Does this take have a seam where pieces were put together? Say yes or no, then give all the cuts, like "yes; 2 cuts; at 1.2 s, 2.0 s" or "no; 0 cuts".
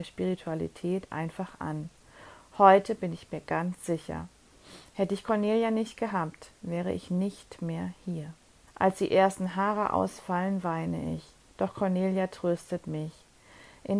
yes; 1 cut; at 8.7 s